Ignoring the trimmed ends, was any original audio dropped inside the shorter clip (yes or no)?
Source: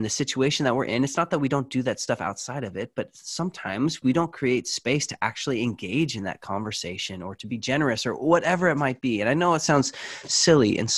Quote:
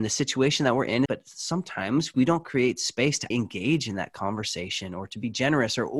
yes